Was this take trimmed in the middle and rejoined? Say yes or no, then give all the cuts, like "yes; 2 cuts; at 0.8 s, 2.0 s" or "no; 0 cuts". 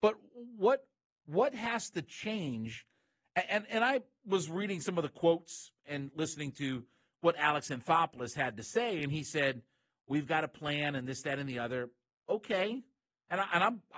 no; 0 cuts